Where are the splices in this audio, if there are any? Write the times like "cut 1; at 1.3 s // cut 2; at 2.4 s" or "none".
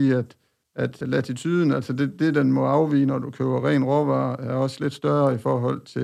cut 1; at 1.0 s